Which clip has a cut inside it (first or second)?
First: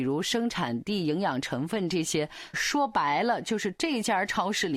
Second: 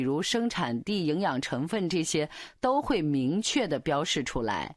first